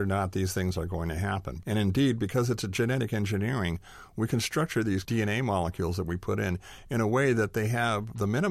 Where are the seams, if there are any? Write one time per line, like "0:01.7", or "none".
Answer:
0:01.6